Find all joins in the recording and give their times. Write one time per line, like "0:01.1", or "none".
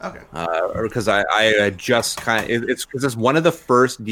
none